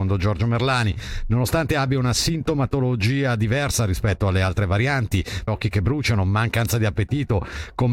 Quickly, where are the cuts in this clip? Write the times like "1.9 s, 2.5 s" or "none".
5.5 s